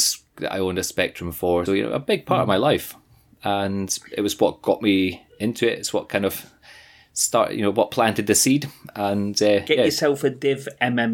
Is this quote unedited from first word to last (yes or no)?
no